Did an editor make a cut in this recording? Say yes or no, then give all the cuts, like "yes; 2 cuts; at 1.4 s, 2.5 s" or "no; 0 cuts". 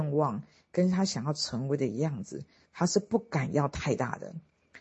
no; 0 cuts